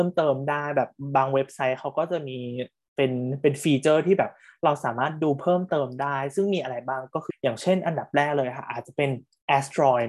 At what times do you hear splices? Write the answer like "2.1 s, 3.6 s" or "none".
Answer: 7.3 s